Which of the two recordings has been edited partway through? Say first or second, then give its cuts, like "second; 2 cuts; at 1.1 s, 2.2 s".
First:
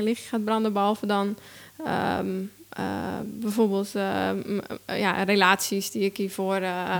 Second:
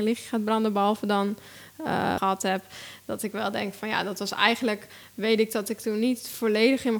second; 1 cut; at 2.2 s